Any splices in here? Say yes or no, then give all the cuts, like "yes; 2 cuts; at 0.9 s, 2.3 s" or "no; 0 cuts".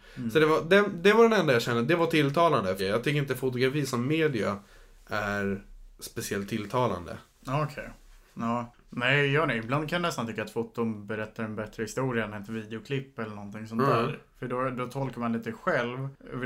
yes; 1 cut; at 2.8 s